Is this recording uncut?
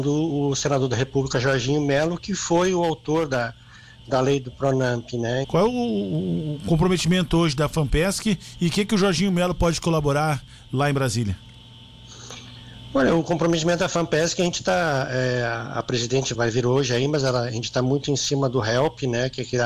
no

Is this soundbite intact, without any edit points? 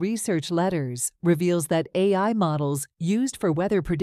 yes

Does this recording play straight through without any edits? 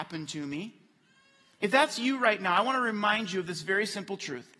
yes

